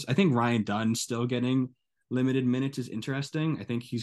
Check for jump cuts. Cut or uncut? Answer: uncut